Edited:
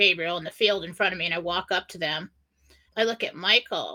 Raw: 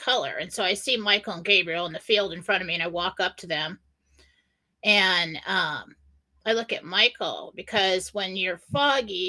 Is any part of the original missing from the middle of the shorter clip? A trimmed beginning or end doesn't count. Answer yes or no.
yes